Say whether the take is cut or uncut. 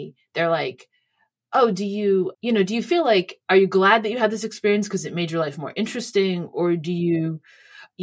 uncut